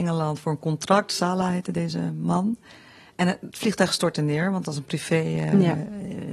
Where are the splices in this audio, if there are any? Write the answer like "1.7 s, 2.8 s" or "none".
none